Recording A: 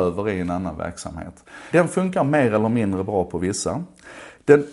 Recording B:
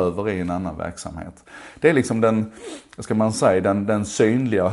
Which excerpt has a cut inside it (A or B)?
A